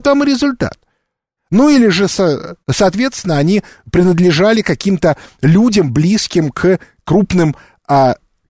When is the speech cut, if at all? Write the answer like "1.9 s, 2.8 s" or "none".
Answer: 1.4 s, 2.6 s